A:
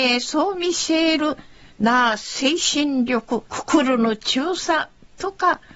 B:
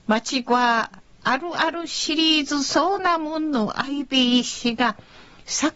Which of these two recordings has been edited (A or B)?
A